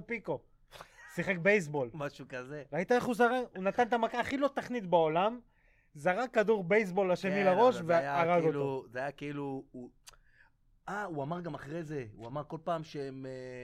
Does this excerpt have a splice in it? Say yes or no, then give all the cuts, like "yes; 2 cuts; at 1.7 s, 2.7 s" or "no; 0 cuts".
no; 0 cuts